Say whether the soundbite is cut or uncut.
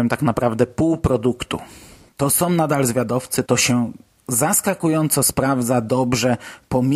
cut